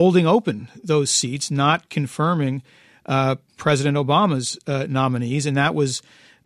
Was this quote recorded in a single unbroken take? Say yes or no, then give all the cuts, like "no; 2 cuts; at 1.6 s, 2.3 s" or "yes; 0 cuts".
yes; 0 cuts